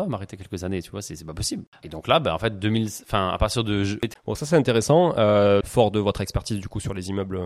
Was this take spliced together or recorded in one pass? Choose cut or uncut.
cut